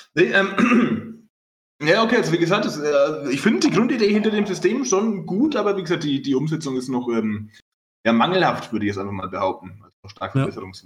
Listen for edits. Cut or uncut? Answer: uncut